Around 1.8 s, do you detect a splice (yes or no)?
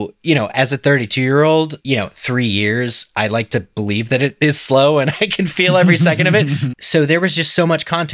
no